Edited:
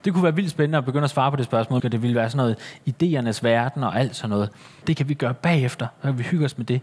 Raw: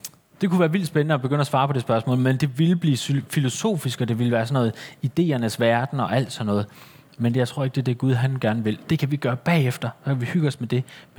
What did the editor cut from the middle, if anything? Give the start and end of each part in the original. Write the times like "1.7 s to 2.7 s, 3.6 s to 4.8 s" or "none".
2.2 s to 4.0 s, 7.0 s to 8.8 s